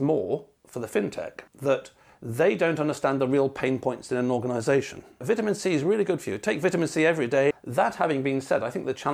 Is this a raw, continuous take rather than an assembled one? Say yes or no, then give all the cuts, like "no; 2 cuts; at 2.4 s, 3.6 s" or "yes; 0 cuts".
no; 3 cuts; at 1.5 s, 5.2 s, 7.5 s